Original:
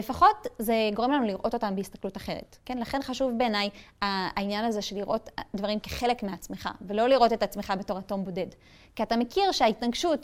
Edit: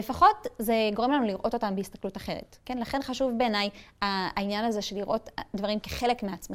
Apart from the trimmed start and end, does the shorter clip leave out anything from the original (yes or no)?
no